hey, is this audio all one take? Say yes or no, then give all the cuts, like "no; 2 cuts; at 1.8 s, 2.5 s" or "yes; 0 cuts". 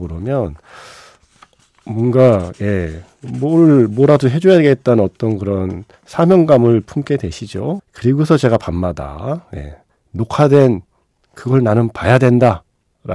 no; 1 cut; at 7.8 s